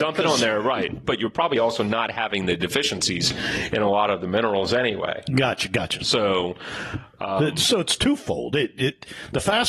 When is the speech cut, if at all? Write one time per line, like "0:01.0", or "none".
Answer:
none